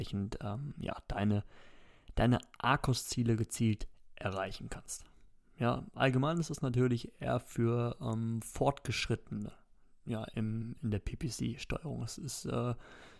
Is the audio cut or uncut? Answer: uncut